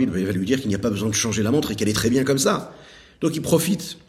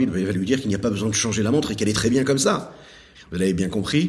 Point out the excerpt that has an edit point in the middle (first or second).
second